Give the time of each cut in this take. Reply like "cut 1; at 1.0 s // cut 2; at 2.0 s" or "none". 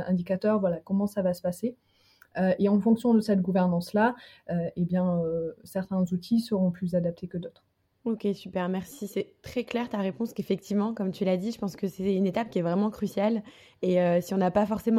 none